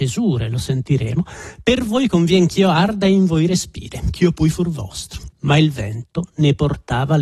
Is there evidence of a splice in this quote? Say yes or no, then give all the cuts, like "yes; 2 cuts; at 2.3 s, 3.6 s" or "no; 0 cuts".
yes; 1 cut; at 5.3 s